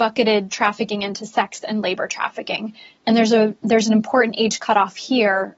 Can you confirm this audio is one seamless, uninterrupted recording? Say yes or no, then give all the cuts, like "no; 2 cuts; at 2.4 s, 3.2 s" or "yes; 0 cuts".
yes; 0 cuts